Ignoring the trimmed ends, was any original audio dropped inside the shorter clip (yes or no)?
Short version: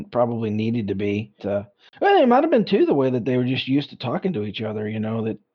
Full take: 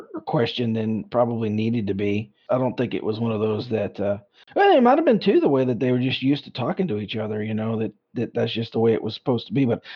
yes